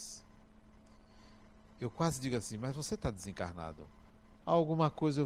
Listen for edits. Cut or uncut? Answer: cut